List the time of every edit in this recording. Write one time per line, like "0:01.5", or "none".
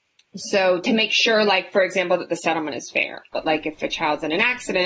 0:03.3